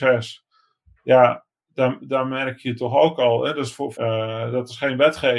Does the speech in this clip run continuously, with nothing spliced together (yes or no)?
no